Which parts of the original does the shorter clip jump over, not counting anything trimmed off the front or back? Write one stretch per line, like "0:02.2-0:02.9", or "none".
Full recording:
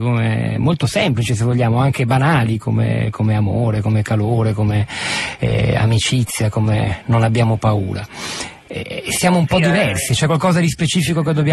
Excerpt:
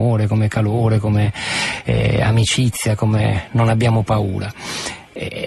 none